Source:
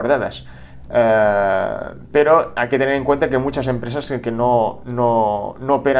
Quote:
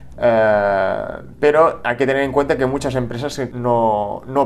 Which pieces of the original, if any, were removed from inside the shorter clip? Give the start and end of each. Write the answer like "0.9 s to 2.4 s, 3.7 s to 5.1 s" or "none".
4.2 s to 4.8 s